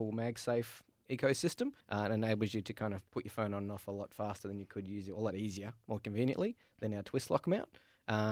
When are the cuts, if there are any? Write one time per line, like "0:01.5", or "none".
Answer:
0:01.8